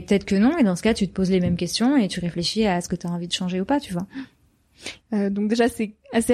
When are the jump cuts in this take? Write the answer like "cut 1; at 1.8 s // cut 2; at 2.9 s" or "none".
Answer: cut 1; at 5.0 s